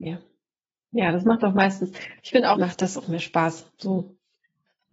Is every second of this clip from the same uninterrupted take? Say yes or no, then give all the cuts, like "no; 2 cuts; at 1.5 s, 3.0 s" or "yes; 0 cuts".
no; 1 cut; at 2.6 s